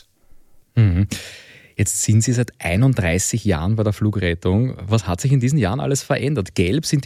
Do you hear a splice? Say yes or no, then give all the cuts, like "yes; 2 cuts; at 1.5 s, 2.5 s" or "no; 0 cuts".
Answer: no; 0 cuts